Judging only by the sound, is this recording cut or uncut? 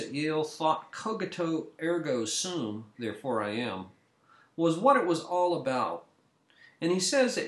cut